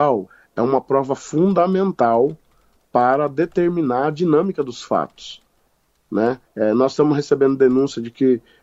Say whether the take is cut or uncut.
cut